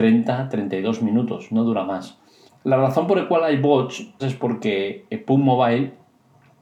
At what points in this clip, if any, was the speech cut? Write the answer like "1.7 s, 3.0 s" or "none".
2.5 s, 4.2 s